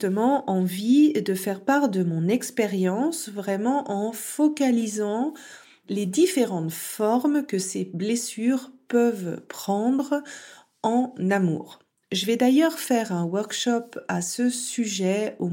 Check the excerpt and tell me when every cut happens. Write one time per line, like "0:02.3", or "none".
none